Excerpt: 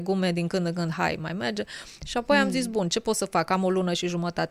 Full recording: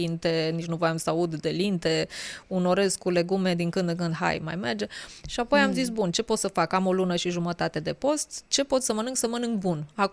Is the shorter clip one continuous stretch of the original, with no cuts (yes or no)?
yes